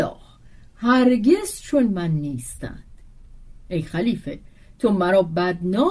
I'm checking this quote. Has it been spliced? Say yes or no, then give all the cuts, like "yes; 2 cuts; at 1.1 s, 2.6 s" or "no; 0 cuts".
no; 0 cuts